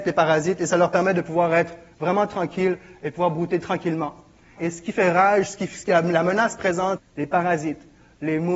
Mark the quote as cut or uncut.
cut